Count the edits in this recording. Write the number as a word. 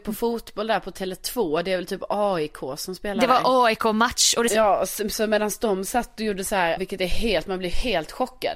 two